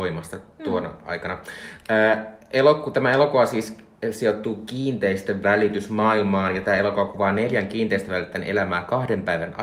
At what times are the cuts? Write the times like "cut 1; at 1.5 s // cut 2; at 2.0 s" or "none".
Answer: none